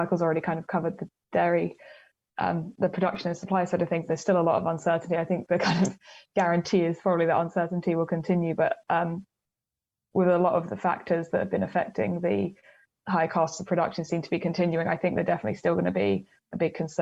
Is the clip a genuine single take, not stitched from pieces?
no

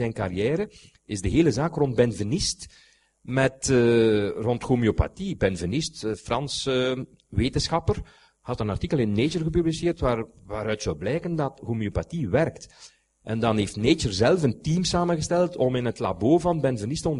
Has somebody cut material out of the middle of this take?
no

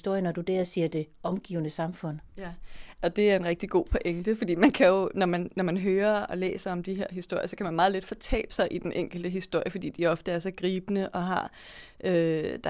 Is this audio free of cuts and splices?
yes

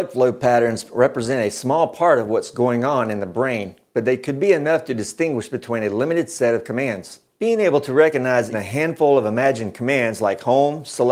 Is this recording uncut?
no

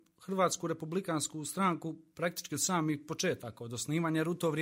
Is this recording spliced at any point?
no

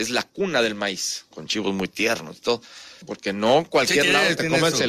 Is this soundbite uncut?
no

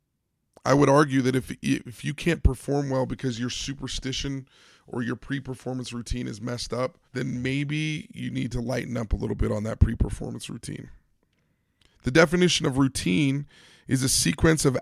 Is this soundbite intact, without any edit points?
no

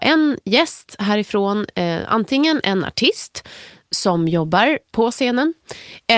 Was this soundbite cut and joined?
no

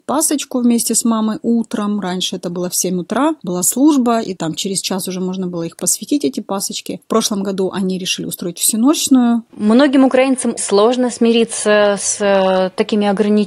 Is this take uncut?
no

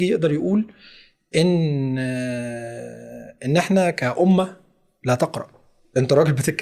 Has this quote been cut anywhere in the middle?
no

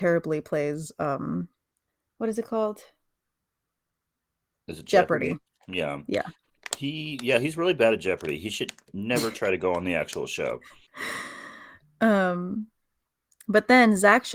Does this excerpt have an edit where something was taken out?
yes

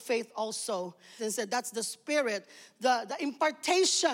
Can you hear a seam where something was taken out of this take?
yes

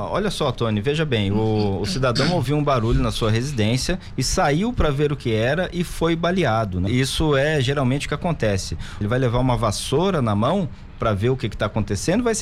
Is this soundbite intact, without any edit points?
no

